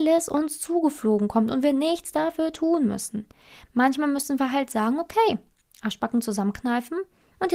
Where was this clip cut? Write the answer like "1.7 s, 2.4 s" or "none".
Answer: none